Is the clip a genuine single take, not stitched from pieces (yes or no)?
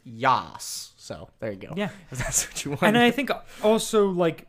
yes